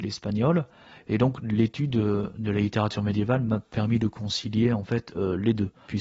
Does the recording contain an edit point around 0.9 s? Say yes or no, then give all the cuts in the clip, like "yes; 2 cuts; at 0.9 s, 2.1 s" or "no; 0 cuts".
no; 0 cuts